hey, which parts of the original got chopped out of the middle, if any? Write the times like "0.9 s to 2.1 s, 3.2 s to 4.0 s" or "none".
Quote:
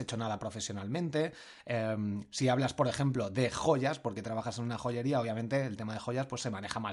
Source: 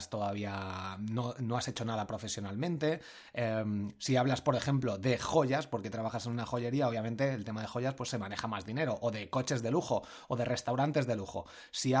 none